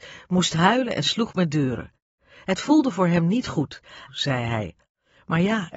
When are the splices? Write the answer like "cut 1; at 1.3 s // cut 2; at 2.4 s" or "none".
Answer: cut 1; at 4.1 s